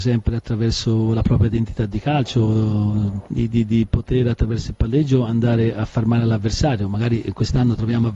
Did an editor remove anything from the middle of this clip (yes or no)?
yes